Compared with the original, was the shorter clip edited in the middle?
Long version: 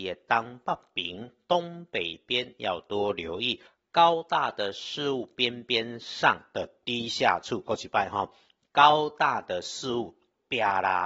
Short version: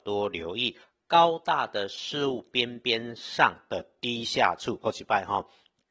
no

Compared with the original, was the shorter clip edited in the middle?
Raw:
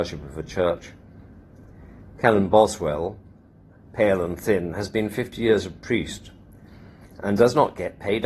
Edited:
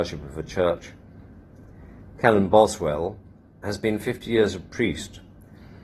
yes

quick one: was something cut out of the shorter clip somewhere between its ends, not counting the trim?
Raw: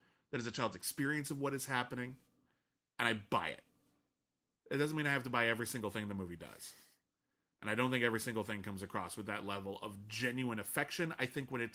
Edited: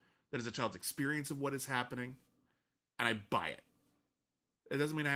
no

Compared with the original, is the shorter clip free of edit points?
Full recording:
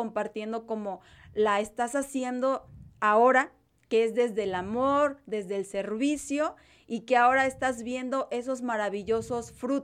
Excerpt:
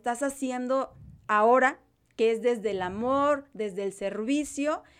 yes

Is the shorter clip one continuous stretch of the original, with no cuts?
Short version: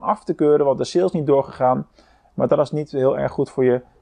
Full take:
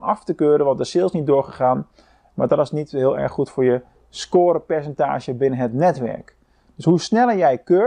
yes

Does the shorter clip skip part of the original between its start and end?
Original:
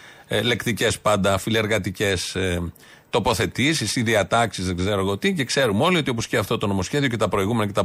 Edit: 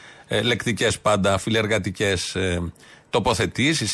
no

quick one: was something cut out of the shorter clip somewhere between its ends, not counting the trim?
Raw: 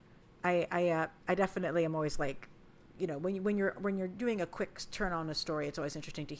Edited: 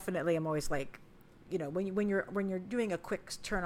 no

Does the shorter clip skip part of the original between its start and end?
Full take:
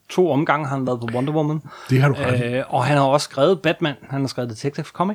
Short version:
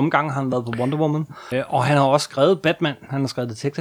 yes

